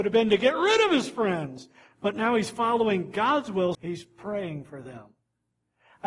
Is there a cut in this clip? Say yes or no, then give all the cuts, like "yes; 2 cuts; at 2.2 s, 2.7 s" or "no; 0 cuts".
yes; 1 cut; at 3.7 s